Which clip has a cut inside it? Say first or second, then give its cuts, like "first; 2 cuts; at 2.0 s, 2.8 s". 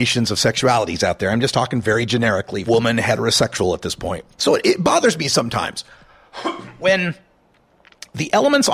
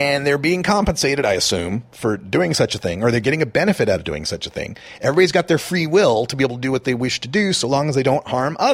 first; 2 cuts; at 2.7 s, 4.3 s